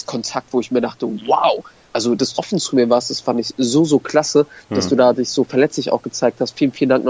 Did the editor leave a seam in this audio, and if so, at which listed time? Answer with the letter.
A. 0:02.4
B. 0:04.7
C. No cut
A